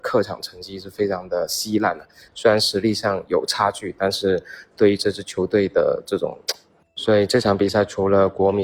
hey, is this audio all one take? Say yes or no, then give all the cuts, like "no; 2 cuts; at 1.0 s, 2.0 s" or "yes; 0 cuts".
no; 2 cuts; at 2.3 s, 6.8 s